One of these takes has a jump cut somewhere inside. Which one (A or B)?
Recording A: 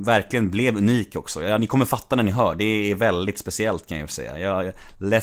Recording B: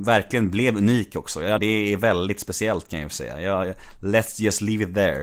B